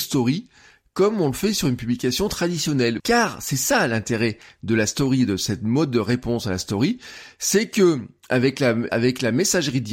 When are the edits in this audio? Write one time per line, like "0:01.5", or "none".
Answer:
0:03.0
0:08.9

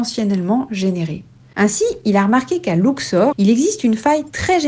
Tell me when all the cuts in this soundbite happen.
0:03.3

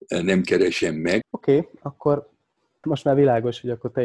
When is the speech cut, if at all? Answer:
0:01.2
0:02.8

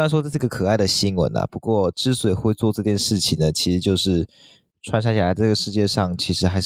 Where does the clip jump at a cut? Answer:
none

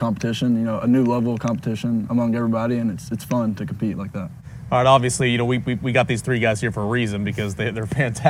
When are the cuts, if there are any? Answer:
0:02.1

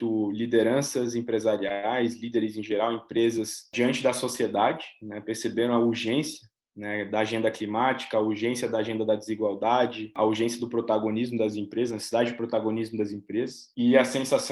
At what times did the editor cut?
none

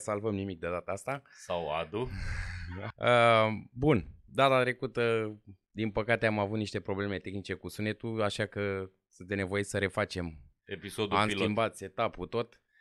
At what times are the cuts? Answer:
0:02.9

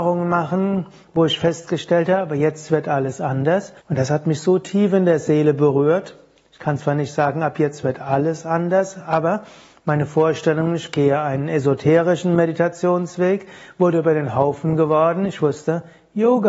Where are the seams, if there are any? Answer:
0:03.8

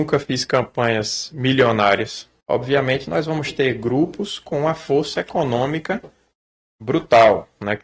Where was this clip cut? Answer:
0:02.4

